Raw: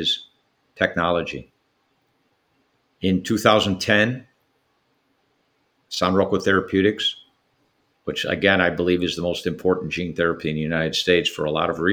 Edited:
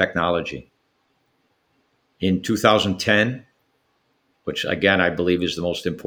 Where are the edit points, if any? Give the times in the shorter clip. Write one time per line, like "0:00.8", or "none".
0:04.3